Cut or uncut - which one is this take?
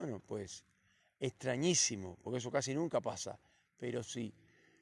uncut